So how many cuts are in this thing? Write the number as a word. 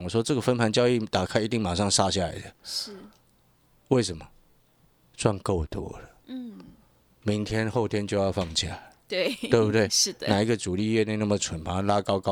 zero